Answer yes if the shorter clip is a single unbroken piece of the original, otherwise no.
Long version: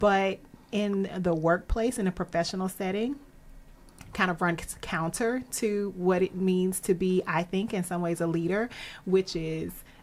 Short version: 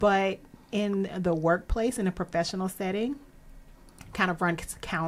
yes